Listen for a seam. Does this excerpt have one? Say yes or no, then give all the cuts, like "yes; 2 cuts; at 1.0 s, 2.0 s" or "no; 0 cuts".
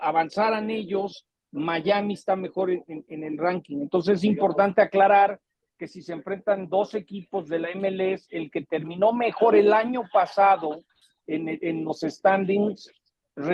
no; 0 cuts